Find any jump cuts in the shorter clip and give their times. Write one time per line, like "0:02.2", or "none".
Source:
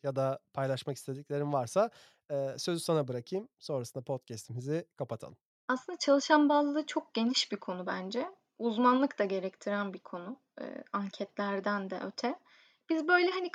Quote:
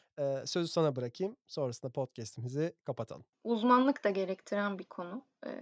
0:03.3